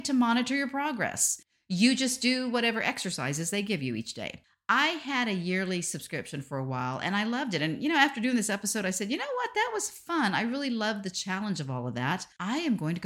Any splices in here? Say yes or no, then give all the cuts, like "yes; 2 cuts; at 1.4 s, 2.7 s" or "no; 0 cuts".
no; 0 cuts